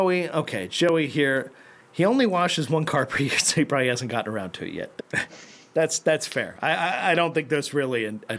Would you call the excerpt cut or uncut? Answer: cut